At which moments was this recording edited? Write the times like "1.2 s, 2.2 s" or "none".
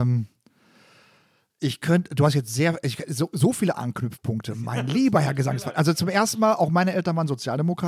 none